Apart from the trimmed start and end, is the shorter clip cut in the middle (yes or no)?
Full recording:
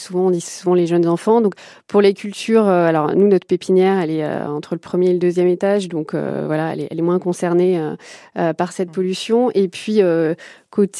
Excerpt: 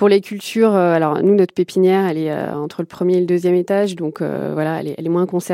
no